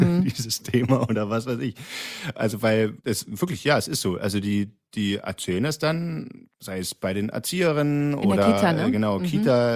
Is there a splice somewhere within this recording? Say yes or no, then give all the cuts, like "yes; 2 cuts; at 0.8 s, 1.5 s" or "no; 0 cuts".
yes; 1 cut; at 3.0 s